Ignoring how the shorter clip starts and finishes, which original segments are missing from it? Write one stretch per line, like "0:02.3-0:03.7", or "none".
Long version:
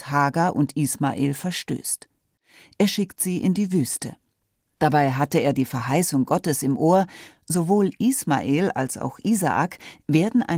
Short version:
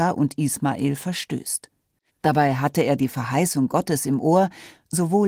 0:02.5-0:04.6